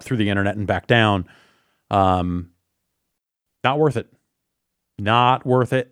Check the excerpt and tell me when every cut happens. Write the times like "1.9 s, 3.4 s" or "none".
none